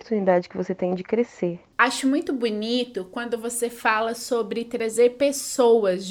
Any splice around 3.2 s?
no; 1 cut; at 1.7 s

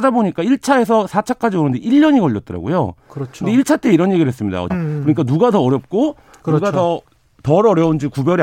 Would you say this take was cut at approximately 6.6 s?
no; 1 cut; at 4.7 s

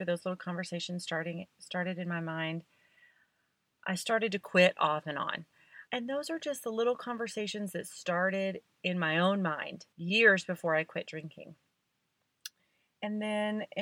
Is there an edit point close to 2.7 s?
no; 2 cuts; at 5.9 s, 9.9 s

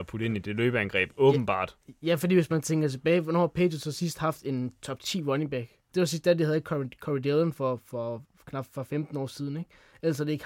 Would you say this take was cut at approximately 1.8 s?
no; 1 cut; at 5.9 s

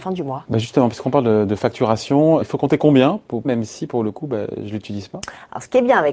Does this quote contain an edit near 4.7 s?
no; 2 cuts; at 2.4 s, 3.4 s

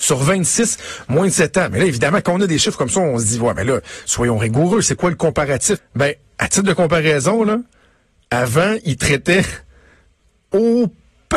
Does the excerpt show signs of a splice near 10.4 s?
no; 1 cut; at 5.8 s

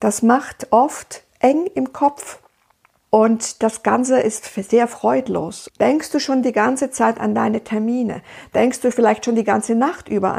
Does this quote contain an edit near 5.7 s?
yes; 2 cuts; at 3.0 s, 5.7 s

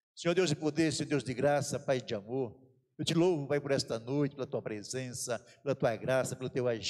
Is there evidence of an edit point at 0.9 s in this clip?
no; 0 cuts

